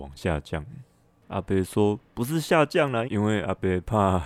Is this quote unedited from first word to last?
no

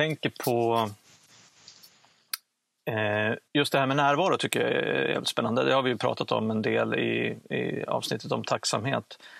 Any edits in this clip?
yes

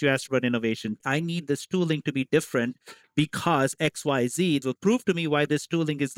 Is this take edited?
yes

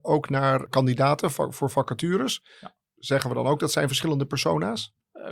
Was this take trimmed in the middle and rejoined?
no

